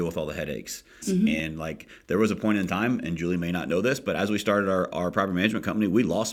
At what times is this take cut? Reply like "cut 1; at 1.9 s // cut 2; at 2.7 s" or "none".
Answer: cut 1; at 1.0 s